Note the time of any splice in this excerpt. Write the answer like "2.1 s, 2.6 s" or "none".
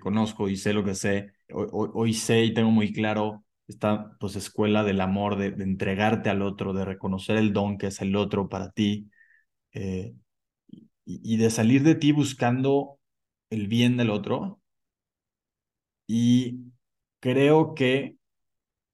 1.5 s